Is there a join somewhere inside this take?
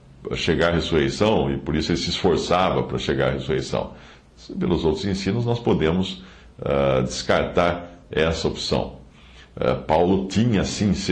no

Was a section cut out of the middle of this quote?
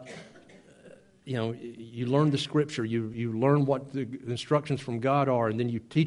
no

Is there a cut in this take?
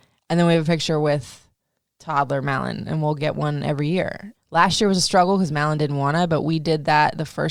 yes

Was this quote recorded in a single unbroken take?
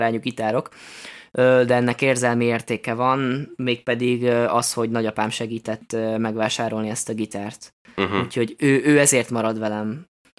yes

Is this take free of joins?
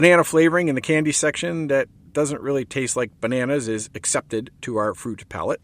yes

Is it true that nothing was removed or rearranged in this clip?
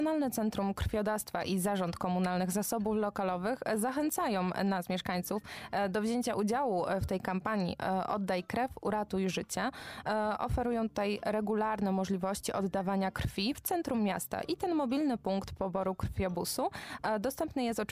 yes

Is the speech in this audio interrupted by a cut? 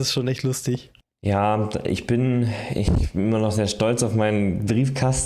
no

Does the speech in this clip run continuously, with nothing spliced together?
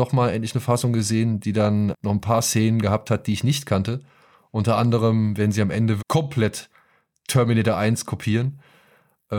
no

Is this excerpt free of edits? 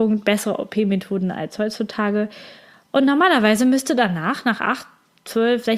yes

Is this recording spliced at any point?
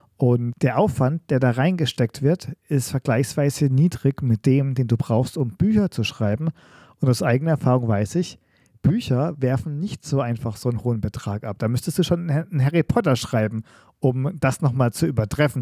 no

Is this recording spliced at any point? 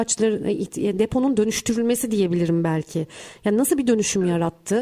no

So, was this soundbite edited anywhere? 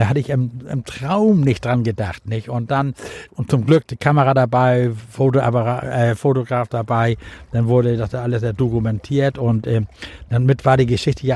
yes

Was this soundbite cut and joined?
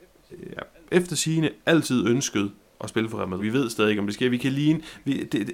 yes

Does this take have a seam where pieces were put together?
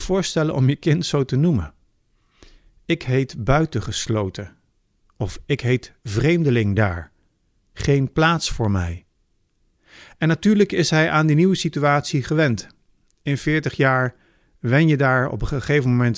no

